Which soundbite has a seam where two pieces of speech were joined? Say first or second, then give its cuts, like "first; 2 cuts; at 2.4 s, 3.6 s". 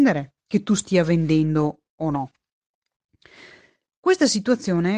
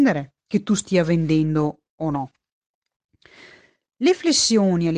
second; 1 cut; at 3.9 s